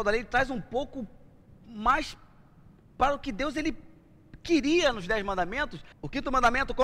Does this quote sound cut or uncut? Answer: cut